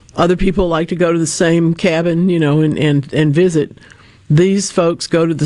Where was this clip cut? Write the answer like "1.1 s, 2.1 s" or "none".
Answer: none